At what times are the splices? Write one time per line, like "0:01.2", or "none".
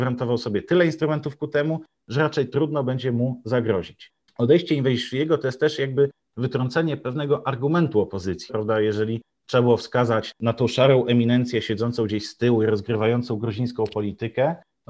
0:04.3
0:08.5